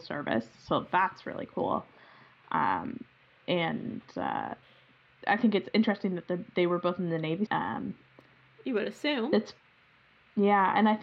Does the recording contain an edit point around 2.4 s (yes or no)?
no